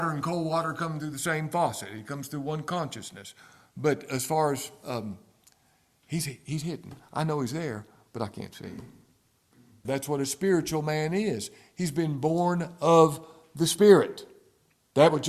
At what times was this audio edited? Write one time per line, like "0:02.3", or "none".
0:09.8